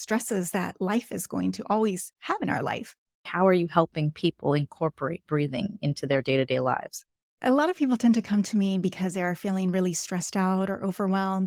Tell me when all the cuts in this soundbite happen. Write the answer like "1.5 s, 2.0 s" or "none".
3.3 s